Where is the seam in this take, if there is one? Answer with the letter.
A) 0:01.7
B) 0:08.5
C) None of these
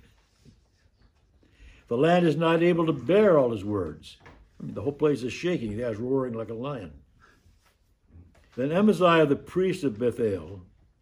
B